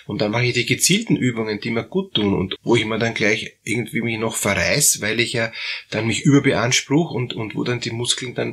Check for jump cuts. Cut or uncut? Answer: cut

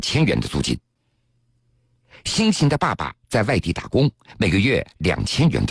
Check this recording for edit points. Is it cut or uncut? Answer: uncut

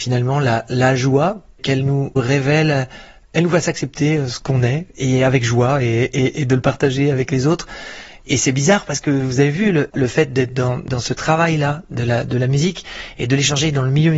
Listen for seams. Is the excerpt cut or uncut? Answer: cut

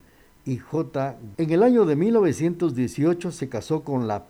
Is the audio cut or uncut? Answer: cut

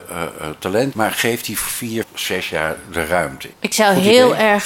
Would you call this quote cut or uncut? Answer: cut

